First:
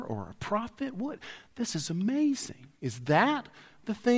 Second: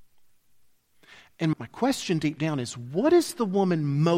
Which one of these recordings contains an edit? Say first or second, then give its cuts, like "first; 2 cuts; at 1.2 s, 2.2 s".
second; 1 cut; at 1.5 s